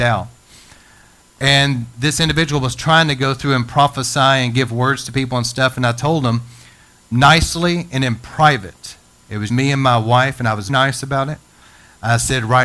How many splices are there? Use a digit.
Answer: 3